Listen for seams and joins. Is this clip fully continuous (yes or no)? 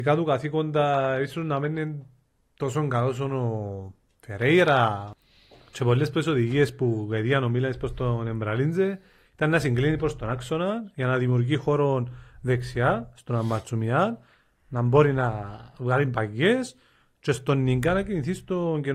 yes